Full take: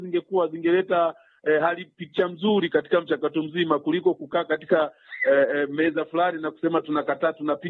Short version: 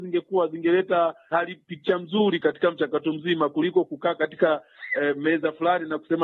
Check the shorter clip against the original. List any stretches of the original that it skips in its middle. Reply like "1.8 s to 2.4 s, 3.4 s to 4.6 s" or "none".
1.3 s to 1.6 s, 5.2 s to 5.5 s